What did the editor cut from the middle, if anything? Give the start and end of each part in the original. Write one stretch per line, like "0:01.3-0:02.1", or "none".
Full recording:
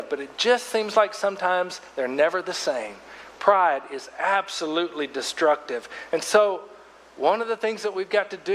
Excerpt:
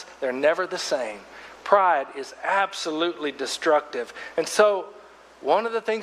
none